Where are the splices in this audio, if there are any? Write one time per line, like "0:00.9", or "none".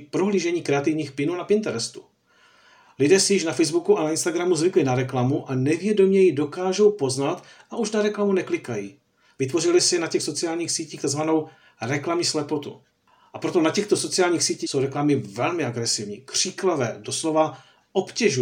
0:14.6